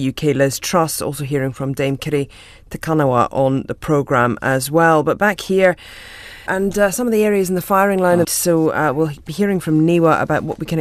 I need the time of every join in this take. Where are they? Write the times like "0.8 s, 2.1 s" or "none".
6.5 s, 8.2 s

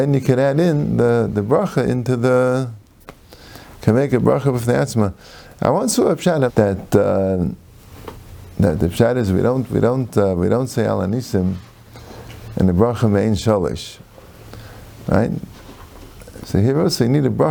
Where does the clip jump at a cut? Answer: 6.5 s, 16.4 s

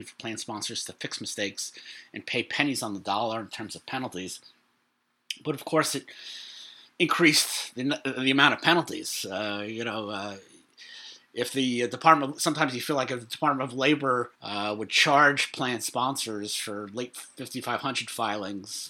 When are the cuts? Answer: 14.3 s

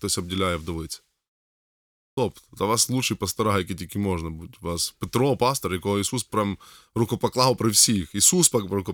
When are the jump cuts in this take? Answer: none

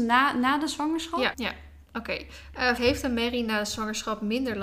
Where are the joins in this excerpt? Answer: 1.3 s, 2.8 s

